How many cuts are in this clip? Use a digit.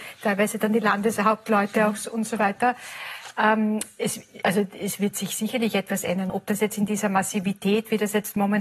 2